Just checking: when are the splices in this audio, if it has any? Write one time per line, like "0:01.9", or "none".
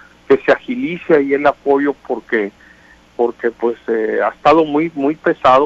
none